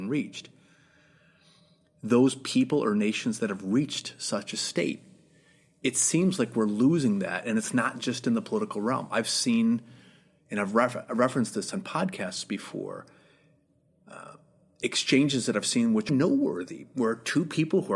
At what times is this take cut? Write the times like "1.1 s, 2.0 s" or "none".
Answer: 9.1 s, 16.1 s